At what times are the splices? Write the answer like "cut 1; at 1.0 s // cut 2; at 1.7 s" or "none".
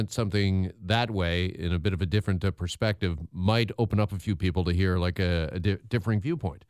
none